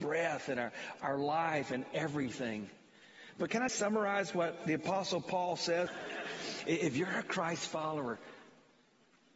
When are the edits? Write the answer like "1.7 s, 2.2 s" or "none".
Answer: 3.7 s, 5.9 s